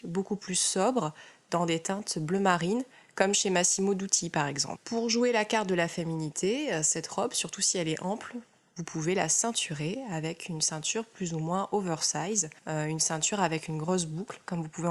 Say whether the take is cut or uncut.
uncut